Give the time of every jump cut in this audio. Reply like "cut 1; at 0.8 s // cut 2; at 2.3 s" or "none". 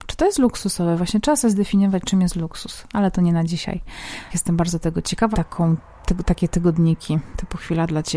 cut 1; at 4.3 s // cut 2; at 5.3 s